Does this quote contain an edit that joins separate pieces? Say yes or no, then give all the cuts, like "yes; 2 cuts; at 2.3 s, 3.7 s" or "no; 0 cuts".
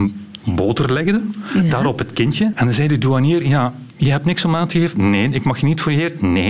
yes; 1 cut; at 2.5 s